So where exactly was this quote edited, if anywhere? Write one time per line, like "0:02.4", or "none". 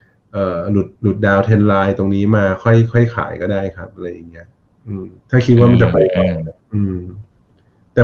0:01.0
0:05.2
0:06.6